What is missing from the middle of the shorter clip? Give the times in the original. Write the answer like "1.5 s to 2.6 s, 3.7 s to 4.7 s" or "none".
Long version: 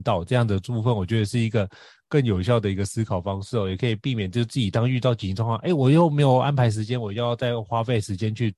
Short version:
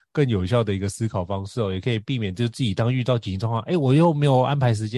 none